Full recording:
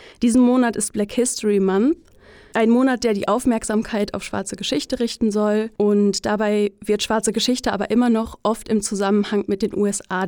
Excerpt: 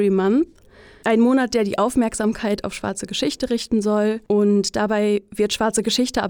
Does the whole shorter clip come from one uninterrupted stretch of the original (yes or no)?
yes